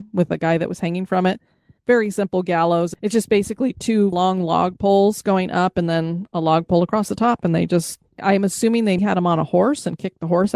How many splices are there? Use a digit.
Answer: 2